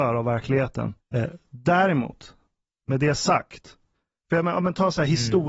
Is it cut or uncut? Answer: cut